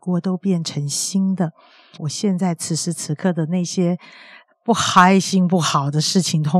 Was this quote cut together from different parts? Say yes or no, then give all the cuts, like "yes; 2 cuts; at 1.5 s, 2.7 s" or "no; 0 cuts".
yes; 1 cut; at 2.0 s